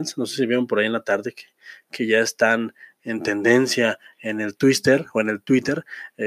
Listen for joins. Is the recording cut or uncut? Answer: uncut